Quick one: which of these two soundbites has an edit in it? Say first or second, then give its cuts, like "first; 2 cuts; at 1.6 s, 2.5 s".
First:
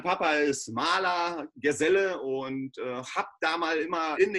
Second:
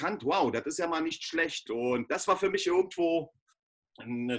second; 1 cut; at 1.7 s